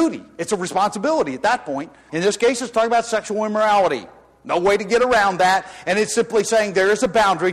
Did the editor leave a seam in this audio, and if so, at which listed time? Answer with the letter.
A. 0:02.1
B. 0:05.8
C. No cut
A